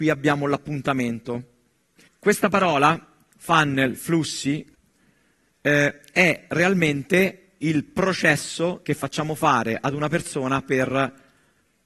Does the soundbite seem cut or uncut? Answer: cut